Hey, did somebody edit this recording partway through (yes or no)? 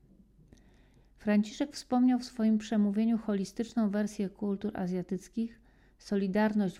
yes